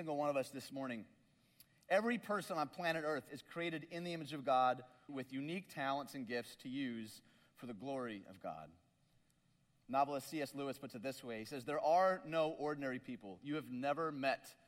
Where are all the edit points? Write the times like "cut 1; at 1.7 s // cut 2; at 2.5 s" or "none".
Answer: cut 1; at 5.1 s